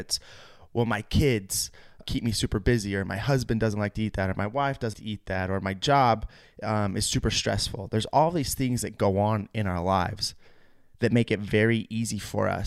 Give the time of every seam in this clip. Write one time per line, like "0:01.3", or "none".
0:02.0
0:04.9